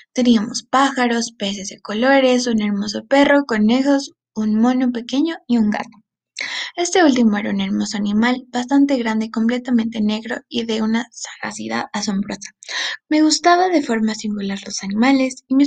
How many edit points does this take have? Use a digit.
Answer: 1